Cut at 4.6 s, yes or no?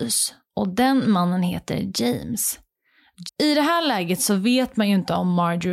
no